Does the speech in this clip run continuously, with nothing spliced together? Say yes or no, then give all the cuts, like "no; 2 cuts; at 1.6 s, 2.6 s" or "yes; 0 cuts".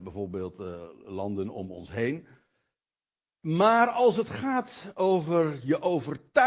yes; 0 cuts